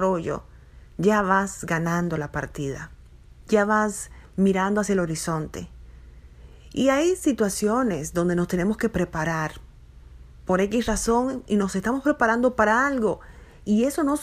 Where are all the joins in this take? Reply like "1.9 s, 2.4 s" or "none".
none